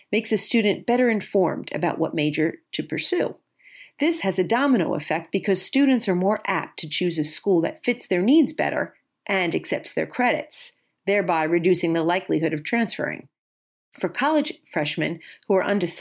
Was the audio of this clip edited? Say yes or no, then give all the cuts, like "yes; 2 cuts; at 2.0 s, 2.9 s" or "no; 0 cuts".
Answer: yes; 1 cut; at 4.2 s